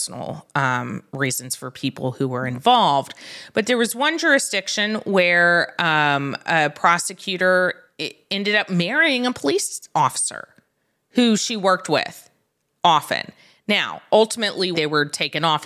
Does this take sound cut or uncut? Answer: cut